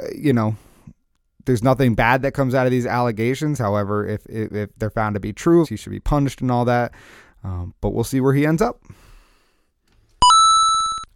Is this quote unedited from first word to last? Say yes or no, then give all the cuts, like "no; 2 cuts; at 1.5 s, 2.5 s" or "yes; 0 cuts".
no; 1 cut; at 5.6 s